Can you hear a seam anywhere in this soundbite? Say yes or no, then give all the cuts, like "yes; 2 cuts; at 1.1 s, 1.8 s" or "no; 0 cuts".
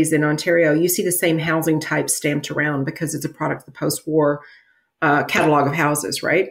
no; 0 cuts